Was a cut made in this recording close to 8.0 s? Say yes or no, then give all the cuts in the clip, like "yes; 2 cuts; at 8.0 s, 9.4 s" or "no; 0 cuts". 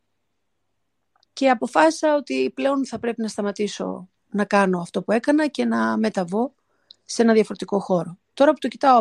no; 2 cuts; at 1.3 s, 4.2 s